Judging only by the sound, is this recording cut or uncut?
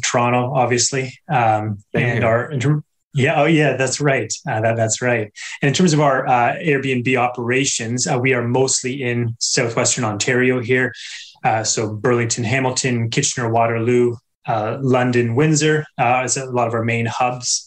uncut